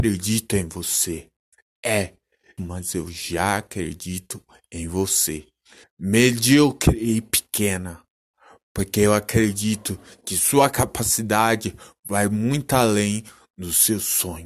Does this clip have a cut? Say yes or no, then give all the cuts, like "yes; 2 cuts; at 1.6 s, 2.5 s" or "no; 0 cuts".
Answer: yes; 2 cuts; at 2.6 s, 5.8 s